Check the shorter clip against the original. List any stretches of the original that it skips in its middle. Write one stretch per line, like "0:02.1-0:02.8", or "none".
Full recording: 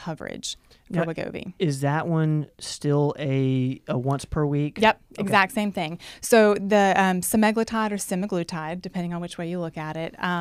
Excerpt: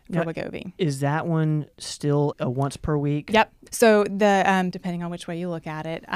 0:03.1-0:03.8
0:05.2-0:06.2
0:07.2-0:08.8